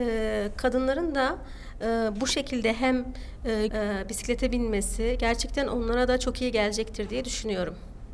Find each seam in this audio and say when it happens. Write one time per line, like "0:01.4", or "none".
0:03.7